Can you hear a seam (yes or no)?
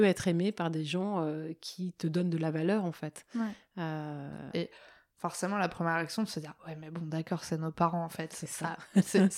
yes